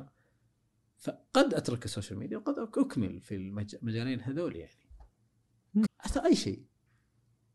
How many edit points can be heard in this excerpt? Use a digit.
1